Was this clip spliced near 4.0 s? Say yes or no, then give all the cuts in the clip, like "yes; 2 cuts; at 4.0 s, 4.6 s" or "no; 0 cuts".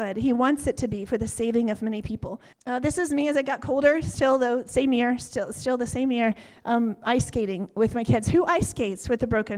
no; 1 cut; at 2.5 s